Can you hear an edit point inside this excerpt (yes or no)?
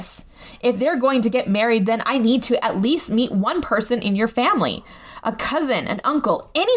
no